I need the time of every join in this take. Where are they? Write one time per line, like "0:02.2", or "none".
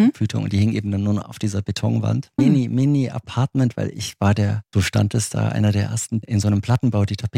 0:02.4
0:04.7
0:06.2